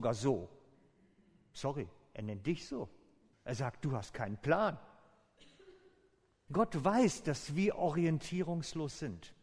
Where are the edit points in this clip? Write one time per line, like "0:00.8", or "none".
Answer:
0:03.3
0:06.5